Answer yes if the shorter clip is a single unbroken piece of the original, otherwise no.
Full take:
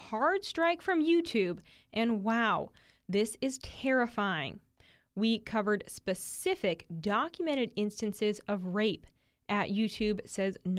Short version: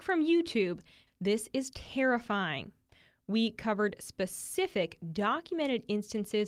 no